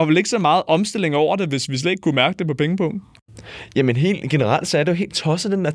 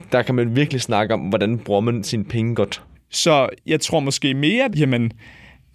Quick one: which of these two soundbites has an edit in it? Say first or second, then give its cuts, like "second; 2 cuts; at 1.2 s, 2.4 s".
second; 2 cuts; at 2.9 s, 4.7 s